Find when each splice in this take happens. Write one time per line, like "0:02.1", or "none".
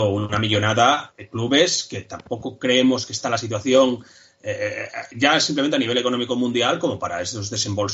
none